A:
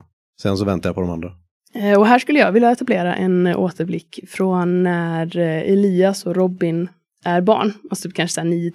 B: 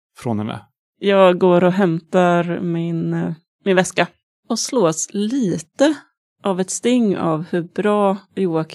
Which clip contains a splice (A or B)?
B